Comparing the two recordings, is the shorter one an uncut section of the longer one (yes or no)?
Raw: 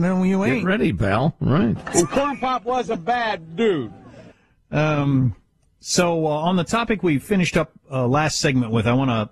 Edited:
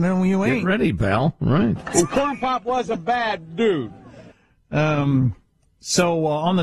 yes